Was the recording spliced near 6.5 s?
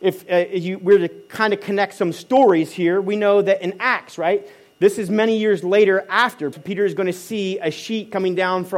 yes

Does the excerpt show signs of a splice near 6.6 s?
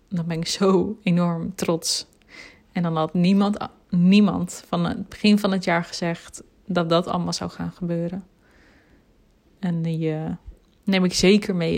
no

